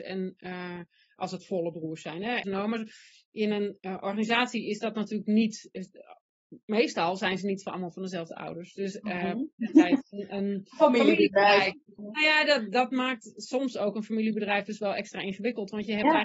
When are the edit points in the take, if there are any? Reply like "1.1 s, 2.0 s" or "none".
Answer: 2.4 s, 10.0 s, 12.0 s